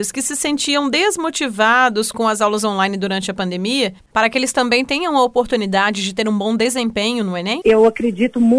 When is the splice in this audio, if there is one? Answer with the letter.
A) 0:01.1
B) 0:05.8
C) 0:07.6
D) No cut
C